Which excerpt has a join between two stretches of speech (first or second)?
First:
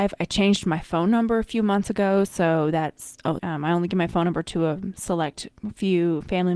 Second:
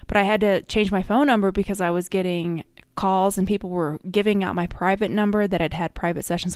first